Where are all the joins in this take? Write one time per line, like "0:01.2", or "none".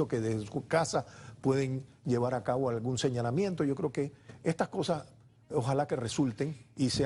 none